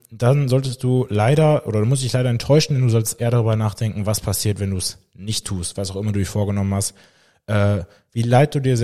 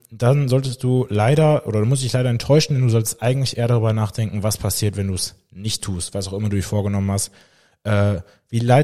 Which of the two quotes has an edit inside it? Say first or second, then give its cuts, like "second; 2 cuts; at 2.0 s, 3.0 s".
first; 1 cut; at 3.2 s